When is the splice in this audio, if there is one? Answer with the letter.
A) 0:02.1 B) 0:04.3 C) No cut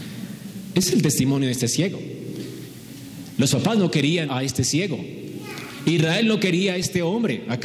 B